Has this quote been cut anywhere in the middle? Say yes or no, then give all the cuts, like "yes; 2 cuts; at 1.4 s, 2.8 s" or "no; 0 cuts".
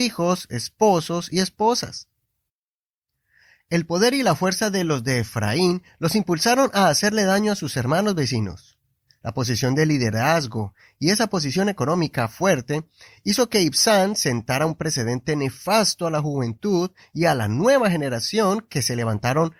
no; 0 cuts